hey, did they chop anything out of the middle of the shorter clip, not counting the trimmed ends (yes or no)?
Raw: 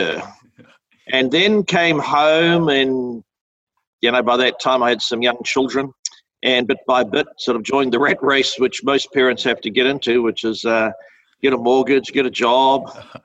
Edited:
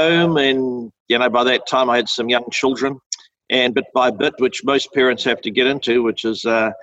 yes